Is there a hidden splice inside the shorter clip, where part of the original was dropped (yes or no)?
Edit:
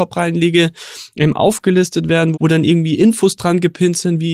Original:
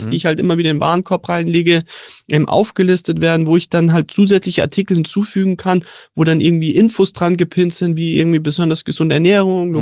yes